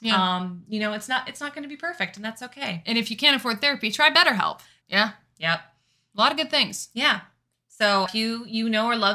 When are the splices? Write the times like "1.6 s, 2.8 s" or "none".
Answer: 4.8 s, 8.1 s